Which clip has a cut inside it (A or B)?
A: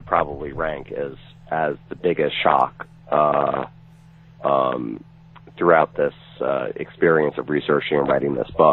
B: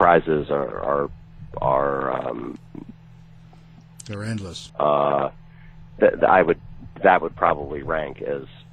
B